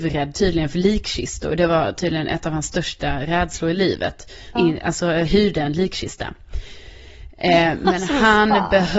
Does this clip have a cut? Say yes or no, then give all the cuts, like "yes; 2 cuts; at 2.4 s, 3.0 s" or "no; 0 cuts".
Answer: yes; 1 cut; at 4.6 s